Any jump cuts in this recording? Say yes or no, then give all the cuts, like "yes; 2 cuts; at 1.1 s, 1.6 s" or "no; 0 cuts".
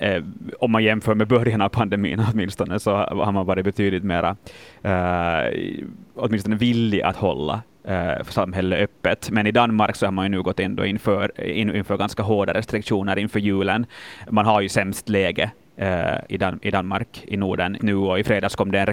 yes; 2 cuts; at 16.3 s, 17.8 s